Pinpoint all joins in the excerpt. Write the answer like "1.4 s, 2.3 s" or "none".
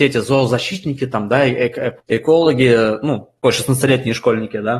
2.0 s, 3.4 s